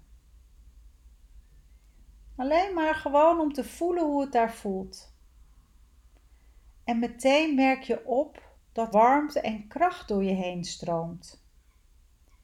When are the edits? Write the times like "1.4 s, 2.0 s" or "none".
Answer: 8.9 s